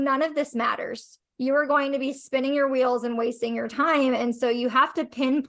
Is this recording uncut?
yes; 0 cuts

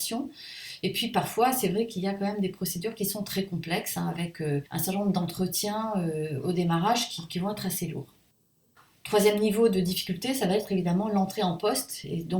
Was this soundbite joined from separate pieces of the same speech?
no; 0 cuts

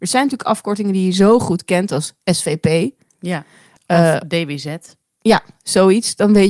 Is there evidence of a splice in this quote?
no; 0 cuts

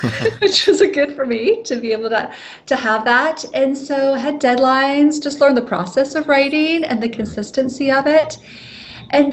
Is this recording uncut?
yes; 0 cuts

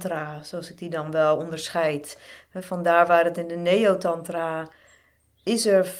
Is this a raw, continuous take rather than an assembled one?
yes; 0 cuts

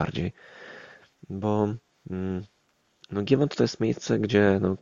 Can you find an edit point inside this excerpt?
no; 0 cuts

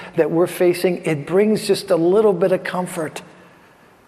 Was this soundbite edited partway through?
no; 0 cuts

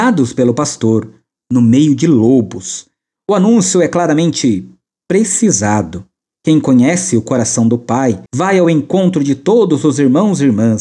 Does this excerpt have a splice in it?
yes; 3 cuts; at 3.1 s, 6.3 s, 8.3 s

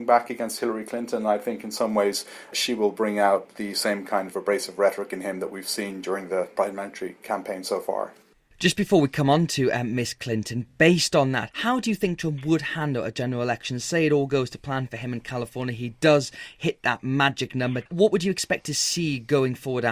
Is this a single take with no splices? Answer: yes; 0 cuts

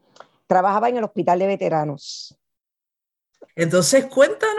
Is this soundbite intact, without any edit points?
no; 1 cut; at 3.5 s

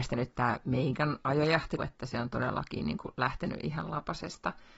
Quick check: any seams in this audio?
yes; 1 cut; at 1.8 s

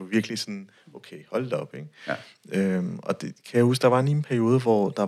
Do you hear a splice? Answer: no; 0 cuts

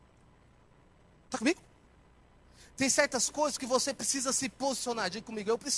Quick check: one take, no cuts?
yes; 0 cuts

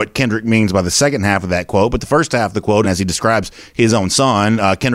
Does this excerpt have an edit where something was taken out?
yes; 1 cut; at 2.8 s

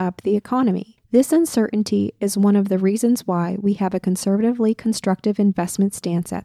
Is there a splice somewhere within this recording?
no; 0 cuts

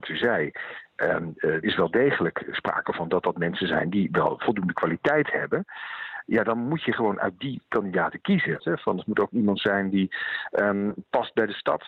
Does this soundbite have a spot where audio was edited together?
yes; 2 cuts; at 1.6 s, 8.6 s

